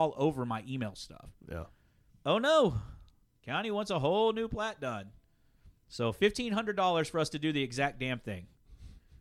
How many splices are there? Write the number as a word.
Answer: one